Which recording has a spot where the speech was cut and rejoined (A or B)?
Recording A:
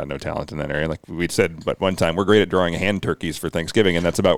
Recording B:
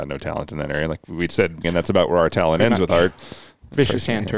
B